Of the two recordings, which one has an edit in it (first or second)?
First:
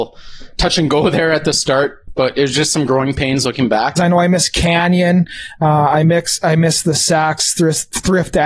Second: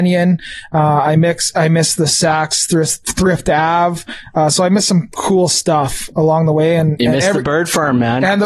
first